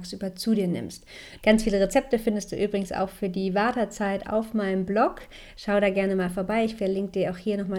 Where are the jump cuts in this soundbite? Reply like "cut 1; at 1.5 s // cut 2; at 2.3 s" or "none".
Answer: cut 1; at 1.4 s